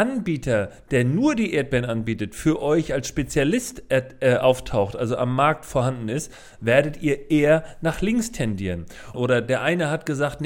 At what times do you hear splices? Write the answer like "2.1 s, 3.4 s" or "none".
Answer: 9.1 s